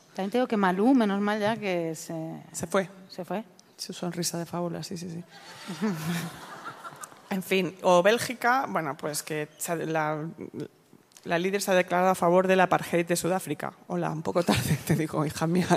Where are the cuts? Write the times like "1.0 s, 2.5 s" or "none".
none